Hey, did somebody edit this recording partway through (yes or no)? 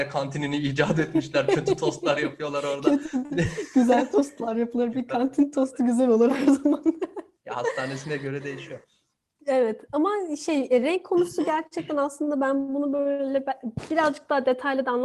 no